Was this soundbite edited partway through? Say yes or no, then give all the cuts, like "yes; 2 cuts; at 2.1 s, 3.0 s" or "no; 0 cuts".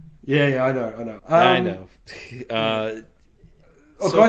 yes; 1 cut; at 1.2 s